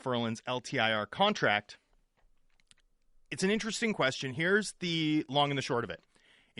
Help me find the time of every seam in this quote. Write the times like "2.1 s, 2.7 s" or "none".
none